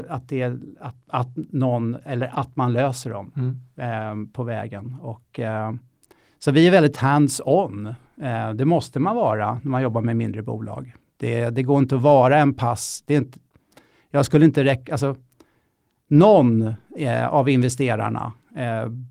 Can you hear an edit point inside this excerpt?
no; 0 cuts

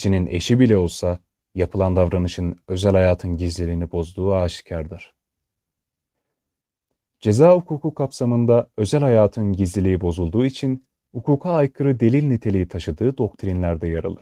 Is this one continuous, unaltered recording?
yes; 0 cuts

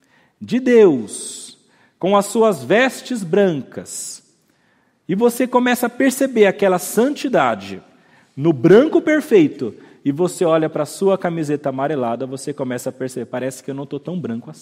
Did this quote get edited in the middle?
no; 0 cuts

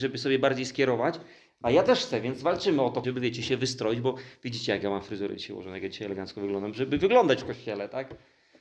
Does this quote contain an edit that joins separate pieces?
yes; 1 cut; at 3.0 s

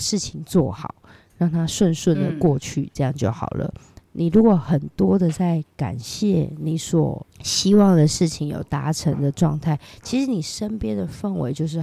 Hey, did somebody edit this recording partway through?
yes; 1 cut; at 4.0 s

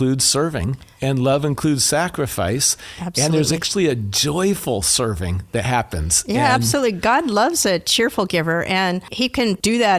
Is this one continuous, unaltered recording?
yes; 0 cuts

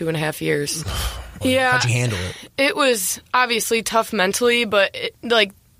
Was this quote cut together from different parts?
yes; 1 cut; at 1.4 s

